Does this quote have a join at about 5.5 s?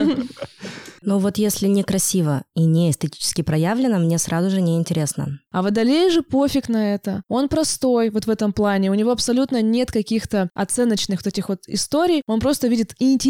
yes; 2 cuts; at 1.0 s, 5.5 s

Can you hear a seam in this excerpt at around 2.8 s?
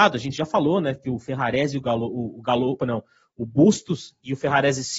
yes; 1 cut; at 2.8 s

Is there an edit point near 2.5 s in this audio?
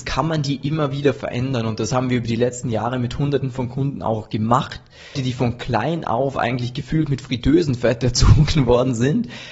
no; 1 cut; at 5.1 s

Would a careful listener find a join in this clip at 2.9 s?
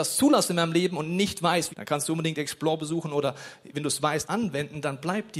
no; 2 cuts; at 1.7 s, 4.2 s

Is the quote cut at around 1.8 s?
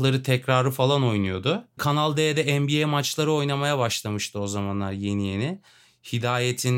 yes; 1 cut; at 1.8 s

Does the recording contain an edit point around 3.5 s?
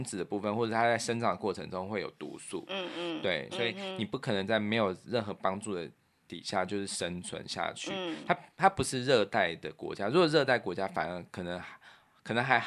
yes; 1 cut; at 3.5 s

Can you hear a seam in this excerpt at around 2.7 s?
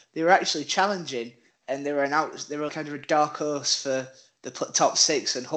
yes; 1 cut; at 2.7 s

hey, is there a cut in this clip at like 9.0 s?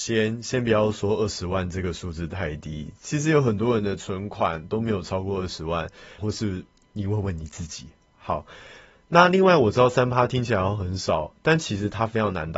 no; 1 cut; at 6.2 s

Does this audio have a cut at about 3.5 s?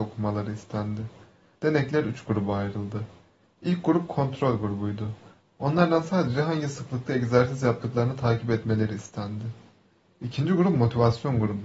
no; 1 cut; at 1.5 s

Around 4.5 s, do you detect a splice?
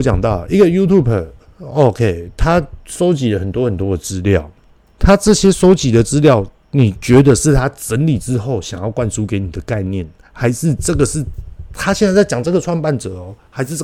no; 0 cuts

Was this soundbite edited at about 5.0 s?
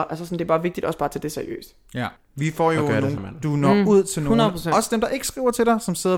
no; 2 cuts; at 2.2 s, 3.2 s

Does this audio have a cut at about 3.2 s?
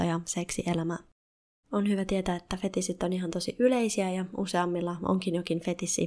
no; 1 cut; at 1.6 s

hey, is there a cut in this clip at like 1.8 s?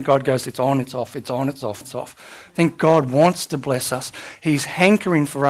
yes; 1 cut; at 1.8 s

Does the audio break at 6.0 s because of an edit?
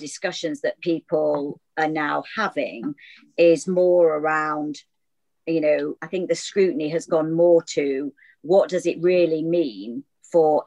yes; 1 cut; at 6.0 s

